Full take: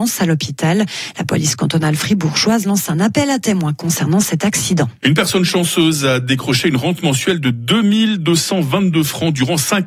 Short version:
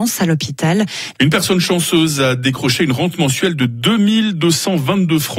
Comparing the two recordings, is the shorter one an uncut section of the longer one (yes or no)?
no